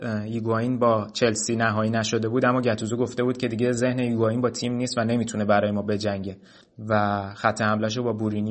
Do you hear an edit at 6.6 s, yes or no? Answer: yes